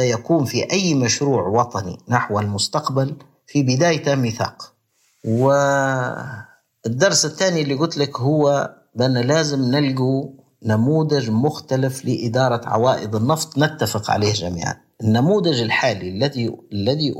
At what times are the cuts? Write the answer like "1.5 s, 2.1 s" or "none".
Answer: none

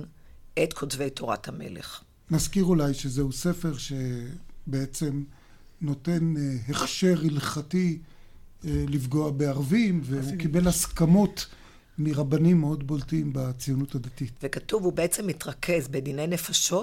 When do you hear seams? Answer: 14.4 s

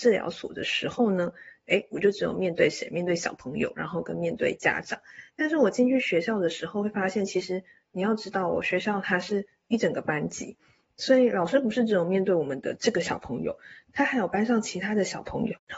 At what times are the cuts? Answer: none

